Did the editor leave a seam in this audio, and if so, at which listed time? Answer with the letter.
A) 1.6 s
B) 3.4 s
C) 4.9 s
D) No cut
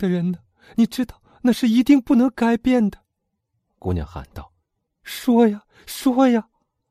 C